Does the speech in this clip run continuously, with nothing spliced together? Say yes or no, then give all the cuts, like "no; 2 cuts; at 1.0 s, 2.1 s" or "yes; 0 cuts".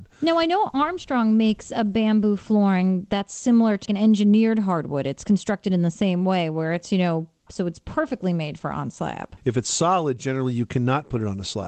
no; 3 cuts; at 3.9 s, 7.5 s, 9.4 s